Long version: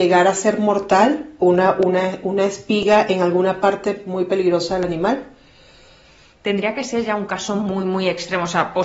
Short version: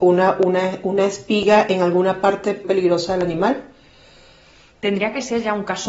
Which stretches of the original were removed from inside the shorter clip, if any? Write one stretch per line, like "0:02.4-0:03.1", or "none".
0:04.0-0:04.3